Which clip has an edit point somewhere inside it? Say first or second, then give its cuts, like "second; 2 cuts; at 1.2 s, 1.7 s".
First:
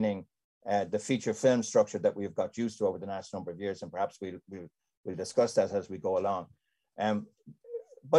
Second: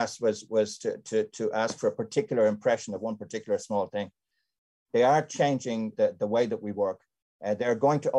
second; 2 cuts; at 4.8 s, 5.9 s